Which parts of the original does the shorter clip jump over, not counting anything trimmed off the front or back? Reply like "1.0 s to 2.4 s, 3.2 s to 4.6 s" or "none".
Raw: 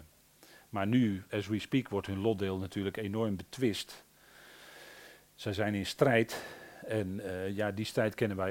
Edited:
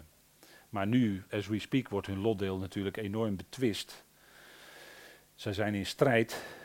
none